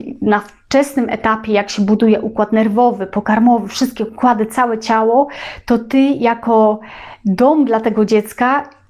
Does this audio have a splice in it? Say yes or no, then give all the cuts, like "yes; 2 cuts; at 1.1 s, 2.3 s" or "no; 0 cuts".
no; 0 cuts